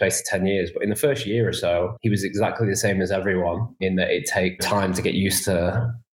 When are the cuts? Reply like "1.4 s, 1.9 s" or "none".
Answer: 2.0 s

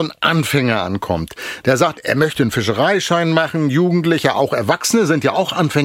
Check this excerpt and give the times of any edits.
none

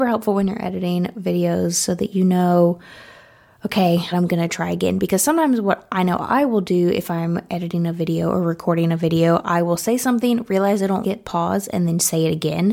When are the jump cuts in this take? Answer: 4.1 s, 11.0 s

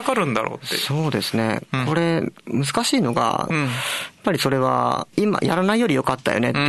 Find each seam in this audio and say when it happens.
3.5 s, 5.1 s

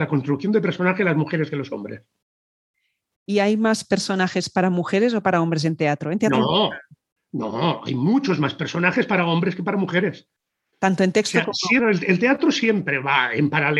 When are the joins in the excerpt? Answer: 11.8 s

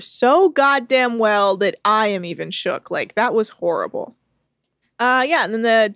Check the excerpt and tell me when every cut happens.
4.8 s

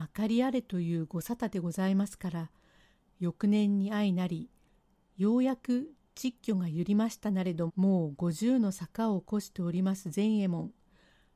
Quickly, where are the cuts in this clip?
7.7 s

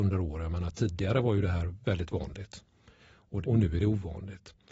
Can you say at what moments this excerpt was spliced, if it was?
1.8 s, 3.4 s

